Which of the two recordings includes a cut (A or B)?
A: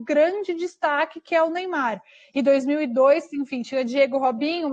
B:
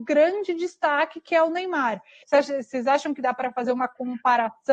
B